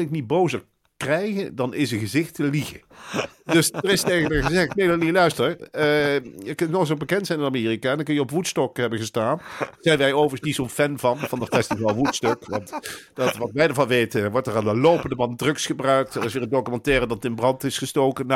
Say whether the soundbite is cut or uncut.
uncut